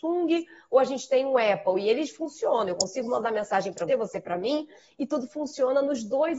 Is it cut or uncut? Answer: cut